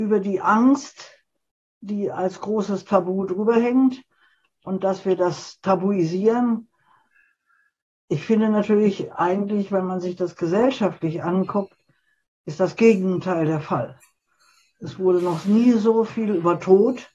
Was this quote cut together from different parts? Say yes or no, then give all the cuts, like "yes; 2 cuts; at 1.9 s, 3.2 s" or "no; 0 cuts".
no; 0 cuts